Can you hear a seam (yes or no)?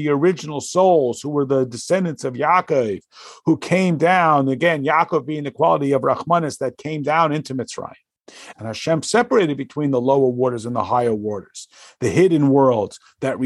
yes